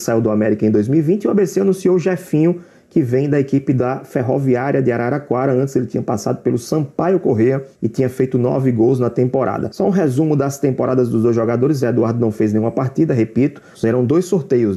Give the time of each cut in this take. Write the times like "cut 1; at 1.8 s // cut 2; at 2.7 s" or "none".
cut 1; at 13.7 s